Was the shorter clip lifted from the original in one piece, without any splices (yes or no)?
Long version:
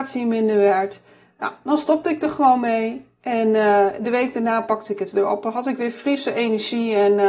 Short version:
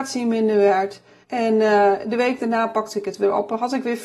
no